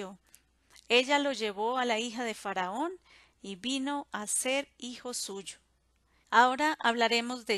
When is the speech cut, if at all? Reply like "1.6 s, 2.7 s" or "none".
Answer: 6.2 s